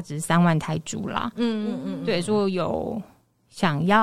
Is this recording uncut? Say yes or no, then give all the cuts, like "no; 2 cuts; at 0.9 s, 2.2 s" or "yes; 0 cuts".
yes; 0 cuts